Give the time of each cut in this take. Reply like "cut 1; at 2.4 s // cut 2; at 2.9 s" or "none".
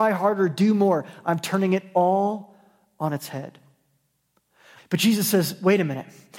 cut 1; at 4.8 s